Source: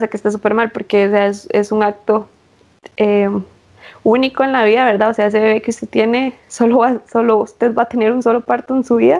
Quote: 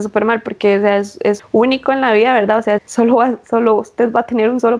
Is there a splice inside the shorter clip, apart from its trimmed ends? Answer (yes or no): yes